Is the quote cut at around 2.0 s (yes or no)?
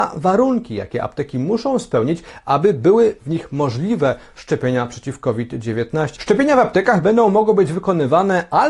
no